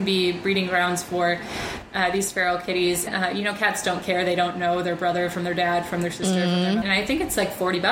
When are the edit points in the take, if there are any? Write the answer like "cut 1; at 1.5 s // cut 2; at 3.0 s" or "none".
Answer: cut 1; at 3.1 s // cut 2; at 6.8 s